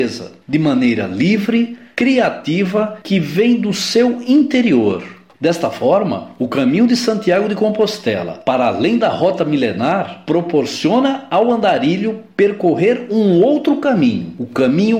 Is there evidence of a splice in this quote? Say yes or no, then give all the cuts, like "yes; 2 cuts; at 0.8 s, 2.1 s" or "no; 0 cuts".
yes; 1 cut; at 5.3 s